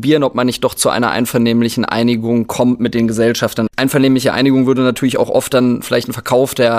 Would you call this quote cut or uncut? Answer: cut